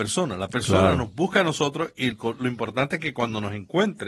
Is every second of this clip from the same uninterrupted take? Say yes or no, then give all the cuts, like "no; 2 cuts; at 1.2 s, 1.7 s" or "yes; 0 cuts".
no; 1 cut; at 2.1 s